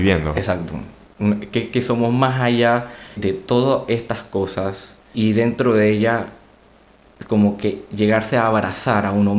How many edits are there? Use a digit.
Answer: 2